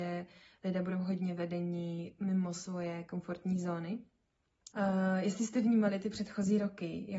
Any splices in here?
yes; 1 cut; at 4.7 s

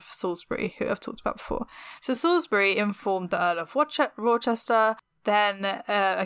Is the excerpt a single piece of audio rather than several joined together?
yes; 0 cuts

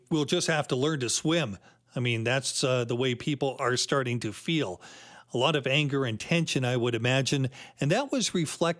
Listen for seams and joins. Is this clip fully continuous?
yes; 0 cuts

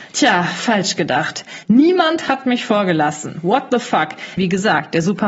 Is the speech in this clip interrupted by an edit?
yes; 2 cuts; at 1.6 s, 4.4 s

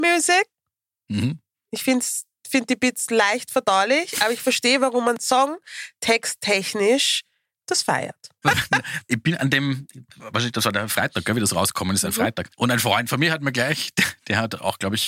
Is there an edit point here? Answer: yes; 1 cut; at 8.4 s

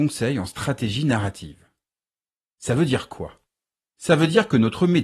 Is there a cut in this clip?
no; 0 cuts

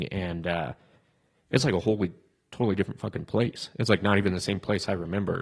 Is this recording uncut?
yes; 0 cuts

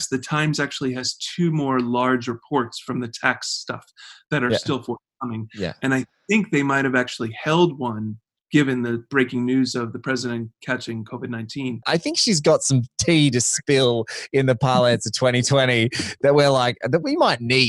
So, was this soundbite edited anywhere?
yes; 1 cut; at 11.8 s

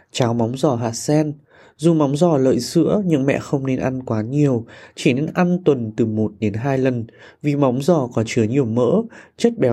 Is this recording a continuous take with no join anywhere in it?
yes; 0 cuts

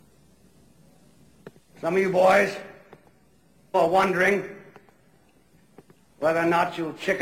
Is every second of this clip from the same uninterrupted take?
no; 1 cut; at 3.7 s

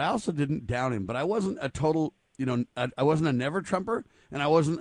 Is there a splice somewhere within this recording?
no; 0 cuts

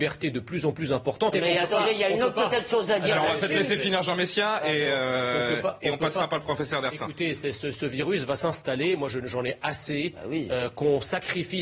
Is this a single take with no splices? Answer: no; 1 cut; at 1.3 s

